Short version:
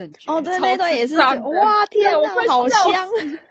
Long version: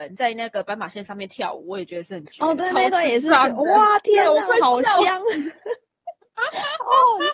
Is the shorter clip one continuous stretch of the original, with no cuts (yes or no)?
yes